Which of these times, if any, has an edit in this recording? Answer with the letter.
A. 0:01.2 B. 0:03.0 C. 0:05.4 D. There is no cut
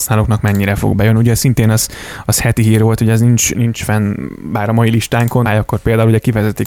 C